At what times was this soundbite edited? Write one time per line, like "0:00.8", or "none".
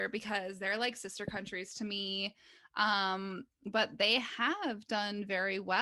none